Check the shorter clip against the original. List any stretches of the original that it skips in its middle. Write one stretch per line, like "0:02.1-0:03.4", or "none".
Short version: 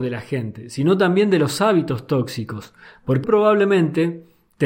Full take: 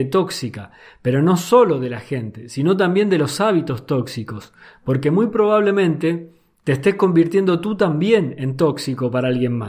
0:05.0-0:05.3